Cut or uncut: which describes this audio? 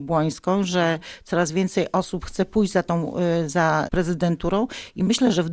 cut